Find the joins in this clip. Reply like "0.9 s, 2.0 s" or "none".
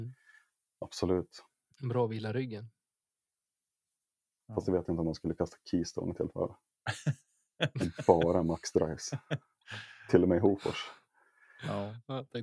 none